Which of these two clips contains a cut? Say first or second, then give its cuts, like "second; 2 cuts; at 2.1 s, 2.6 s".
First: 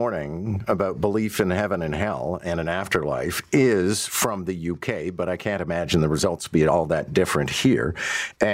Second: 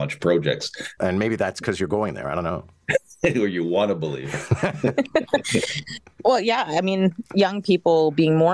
second; 1 cut; at 1.0 s